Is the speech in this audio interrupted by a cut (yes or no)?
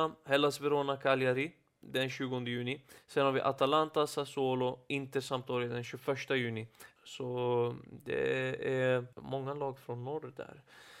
yes